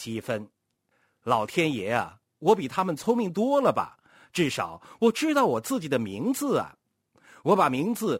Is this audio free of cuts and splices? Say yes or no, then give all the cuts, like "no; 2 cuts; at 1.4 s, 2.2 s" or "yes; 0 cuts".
yes; 0 cuts